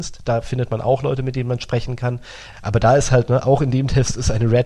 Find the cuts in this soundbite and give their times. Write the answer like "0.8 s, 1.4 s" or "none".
2.5 s